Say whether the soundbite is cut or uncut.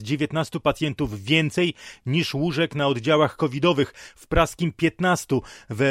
uncut